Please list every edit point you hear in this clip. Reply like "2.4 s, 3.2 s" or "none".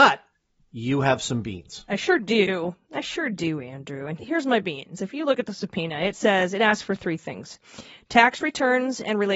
4.2 s